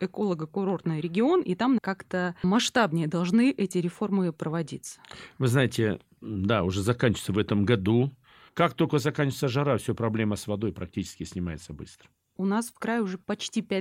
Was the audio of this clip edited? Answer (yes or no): yes